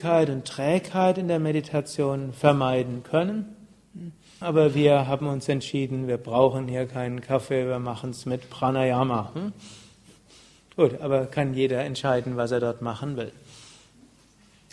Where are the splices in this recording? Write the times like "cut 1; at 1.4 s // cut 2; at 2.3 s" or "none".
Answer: cut 1; at 4.4 s